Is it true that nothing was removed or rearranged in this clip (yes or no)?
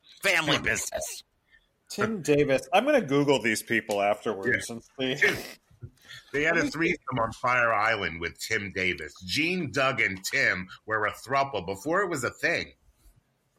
yes